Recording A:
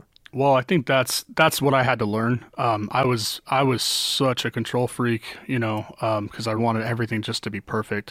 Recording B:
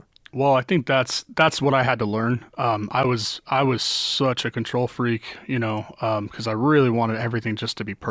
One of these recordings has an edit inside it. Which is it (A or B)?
A